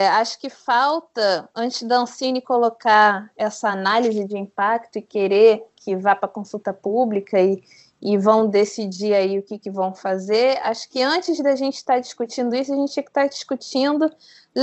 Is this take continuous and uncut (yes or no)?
yes